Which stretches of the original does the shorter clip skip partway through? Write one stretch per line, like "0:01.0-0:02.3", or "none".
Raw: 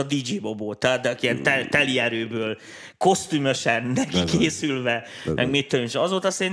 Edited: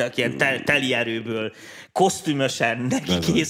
none